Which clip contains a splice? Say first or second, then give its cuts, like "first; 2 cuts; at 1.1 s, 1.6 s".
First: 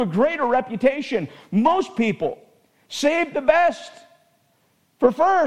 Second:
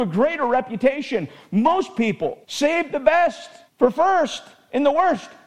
second; 2 cuts; at 2.4 s, 3.7 s